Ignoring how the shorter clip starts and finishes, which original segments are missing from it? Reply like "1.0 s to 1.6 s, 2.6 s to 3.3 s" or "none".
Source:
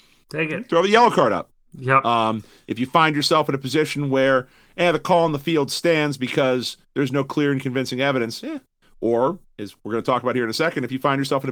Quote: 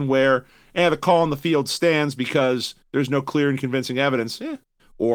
none